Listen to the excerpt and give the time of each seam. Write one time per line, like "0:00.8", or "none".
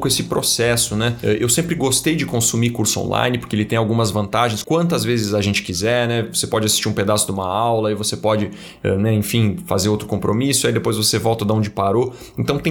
0:04.6